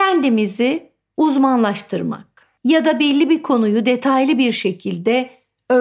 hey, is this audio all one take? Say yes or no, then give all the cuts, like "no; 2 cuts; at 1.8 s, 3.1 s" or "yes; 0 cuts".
no; 1 cut; at 2.6 s